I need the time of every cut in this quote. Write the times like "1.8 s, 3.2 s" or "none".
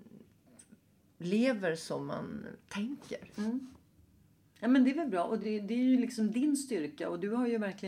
none